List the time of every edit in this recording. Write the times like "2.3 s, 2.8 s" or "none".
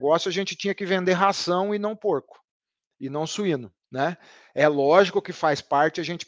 3.8 s

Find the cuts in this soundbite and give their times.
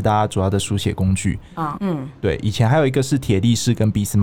1.8 s

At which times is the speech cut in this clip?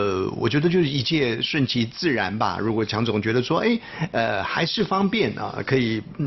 none

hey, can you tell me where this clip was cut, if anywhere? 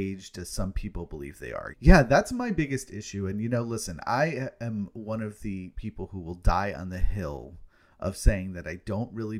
1.7 s

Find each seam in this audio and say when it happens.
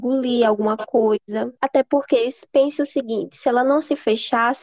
1.6 s

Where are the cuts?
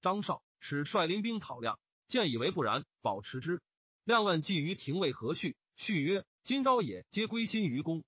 1.9 s

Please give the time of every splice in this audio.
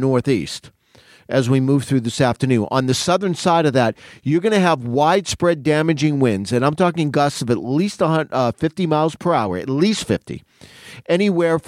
none

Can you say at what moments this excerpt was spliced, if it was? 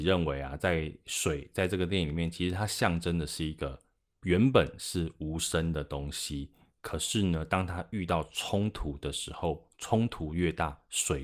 none

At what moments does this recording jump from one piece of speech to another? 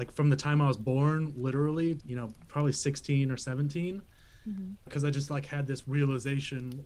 2.0 s

